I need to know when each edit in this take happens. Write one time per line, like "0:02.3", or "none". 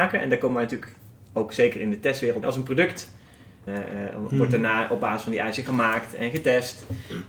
0:02.4
0:03.7